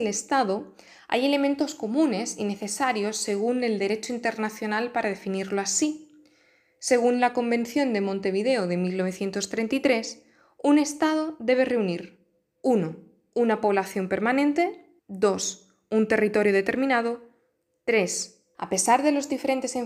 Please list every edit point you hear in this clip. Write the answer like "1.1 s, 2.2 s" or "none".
15.0 s, 18.5 s